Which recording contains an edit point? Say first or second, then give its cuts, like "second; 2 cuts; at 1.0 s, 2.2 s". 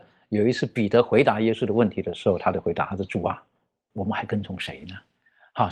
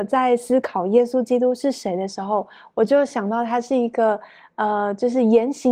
first; 1 cut; at 3.9 s